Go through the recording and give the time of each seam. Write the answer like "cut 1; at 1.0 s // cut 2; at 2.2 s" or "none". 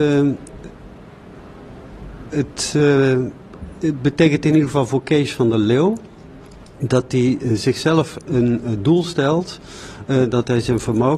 none